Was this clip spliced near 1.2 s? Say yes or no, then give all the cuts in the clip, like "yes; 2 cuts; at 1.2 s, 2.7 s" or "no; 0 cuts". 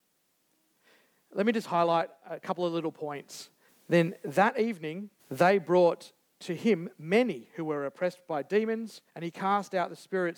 no; 3 cuts; at 3.7 s, 5.2 s, 9.1 s